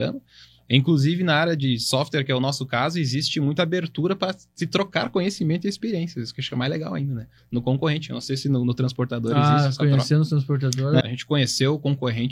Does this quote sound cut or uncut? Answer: cut